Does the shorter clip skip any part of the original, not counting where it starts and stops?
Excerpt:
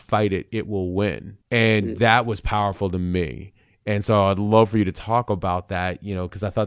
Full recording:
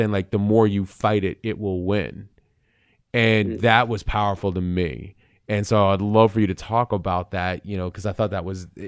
yes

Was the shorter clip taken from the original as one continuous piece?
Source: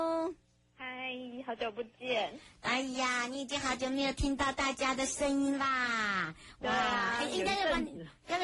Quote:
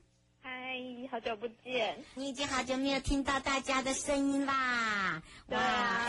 no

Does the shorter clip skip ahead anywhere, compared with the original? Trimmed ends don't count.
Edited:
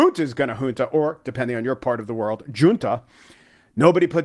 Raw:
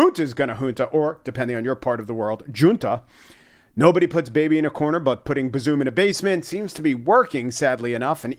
no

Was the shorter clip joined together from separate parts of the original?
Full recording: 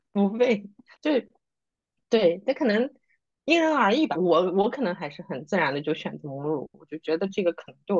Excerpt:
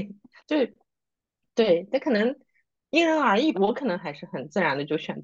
yes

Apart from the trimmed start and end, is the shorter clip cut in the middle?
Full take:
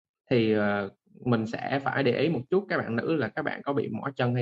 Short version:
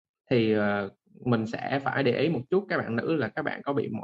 no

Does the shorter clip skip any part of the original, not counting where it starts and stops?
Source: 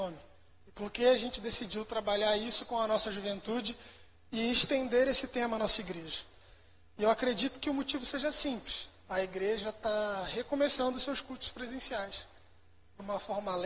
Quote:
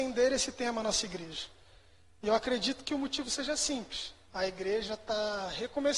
no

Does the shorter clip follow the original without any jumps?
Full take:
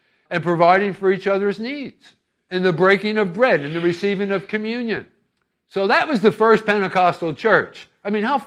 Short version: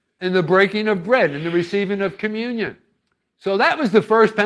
yes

